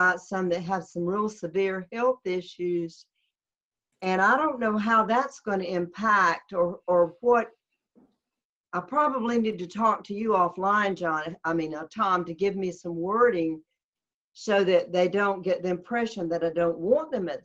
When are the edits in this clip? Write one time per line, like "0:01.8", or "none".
none